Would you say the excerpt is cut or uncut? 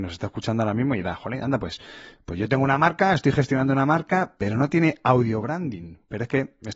uncut